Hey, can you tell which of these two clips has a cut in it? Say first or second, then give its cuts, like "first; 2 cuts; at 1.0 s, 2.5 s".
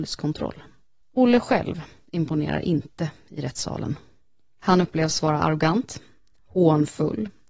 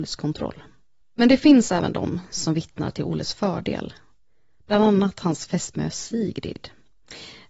first; 1 cut; at 1.0 s